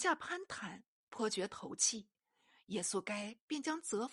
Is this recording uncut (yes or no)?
yes